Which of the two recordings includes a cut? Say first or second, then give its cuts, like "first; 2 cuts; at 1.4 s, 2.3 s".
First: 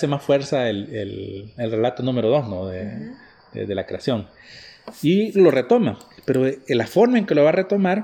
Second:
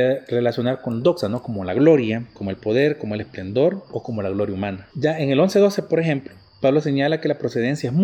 second; 2 cuts; at 2.3 s, 4.9 s